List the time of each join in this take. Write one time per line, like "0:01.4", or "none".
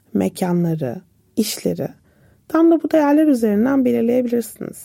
0:01.2